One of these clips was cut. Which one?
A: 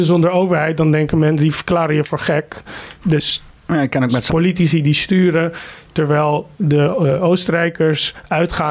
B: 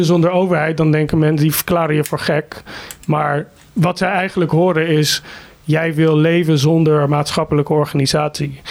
A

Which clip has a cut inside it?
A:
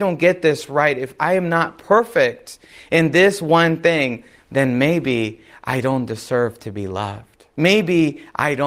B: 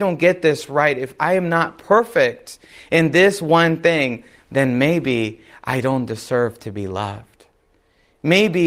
A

